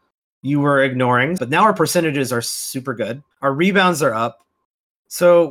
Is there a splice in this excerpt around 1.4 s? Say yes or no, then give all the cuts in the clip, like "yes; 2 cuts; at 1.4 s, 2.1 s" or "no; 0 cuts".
yes; 2 cuts; at 1.4 s, 3.3 s